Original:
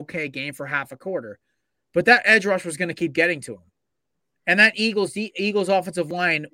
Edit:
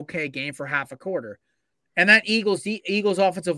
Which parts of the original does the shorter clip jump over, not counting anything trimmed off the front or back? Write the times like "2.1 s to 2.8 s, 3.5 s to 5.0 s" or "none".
1.7 s to 4.2 s